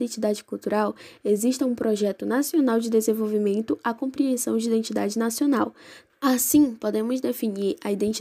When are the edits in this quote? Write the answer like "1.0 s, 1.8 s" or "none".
6.1 s